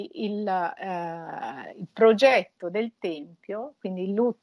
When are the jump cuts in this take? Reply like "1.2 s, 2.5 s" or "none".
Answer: 1.7 s